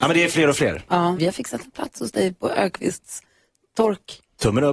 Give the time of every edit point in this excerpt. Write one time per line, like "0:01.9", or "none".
0:01.2